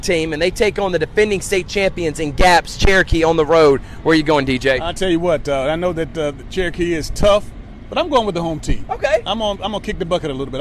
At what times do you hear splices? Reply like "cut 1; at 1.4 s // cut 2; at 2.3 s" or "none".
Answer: none